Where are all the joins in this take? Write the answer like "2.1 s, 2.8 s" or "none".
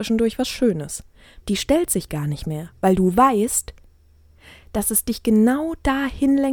1.4 s